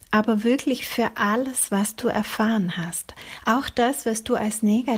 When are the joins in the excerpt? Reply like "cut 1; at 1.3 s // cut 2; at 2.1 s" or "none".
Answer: none